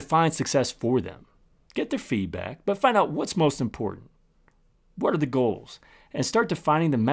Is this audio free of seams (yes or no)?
yes